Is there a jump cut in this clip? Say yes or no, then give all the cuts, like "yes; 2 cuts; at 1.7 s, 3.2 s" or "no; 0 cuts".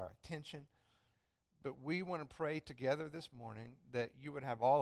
no; 0 cuts